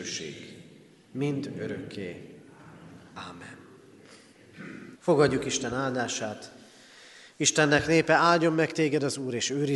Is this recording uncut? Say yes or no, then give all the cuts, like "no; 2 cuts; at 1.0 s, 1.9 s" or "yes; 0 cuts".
no; 1 cut; at 4.9 s